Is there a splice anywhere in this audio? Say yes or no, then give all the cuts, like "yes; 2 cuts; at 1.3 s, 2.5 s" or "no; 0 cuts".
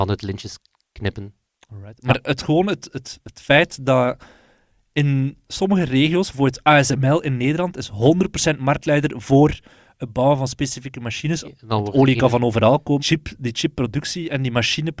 yes; 2 cuts; at 11.4 s, 13.0 s